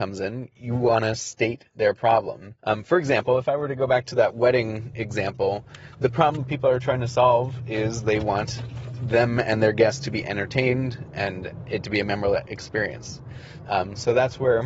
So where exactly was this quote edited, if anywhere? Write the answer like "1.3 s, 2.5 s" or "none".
2.6 s, 13.6 s

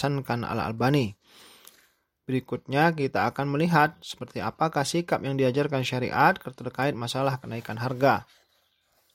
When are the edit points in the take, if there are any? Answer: 2.2 s

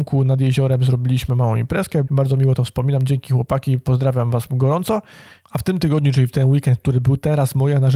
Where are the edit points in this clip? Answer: 2.0 s

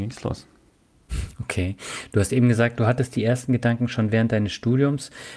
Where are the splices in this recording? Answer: none

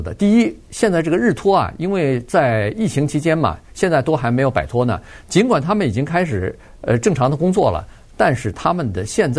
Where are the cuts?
none

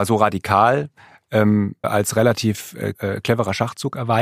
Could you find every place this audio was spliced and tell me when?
1.8 s, 2.9 s

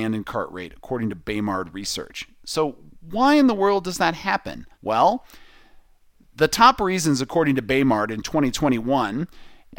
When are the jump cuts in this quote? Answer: 4.7 s

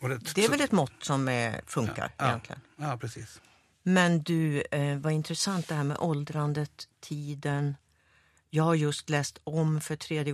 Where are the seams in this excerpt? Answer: none

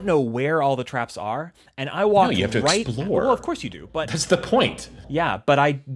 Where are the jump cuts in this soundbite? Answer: 5.0 s

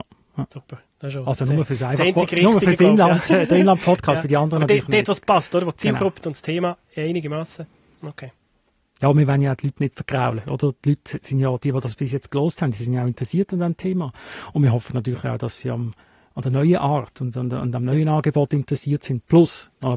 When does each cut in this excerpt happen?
6.2 s

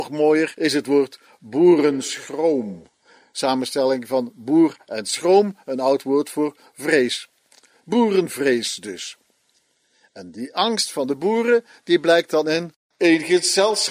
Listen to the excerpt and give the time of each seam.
none

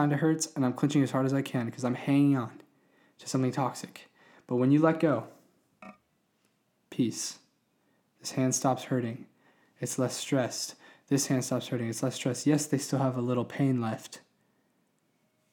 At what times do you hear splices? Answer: none

